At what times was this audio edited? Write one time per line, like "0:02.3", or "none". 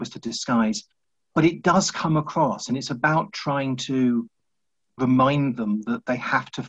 none